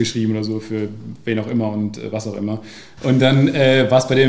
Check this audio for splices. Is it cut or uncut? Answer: cut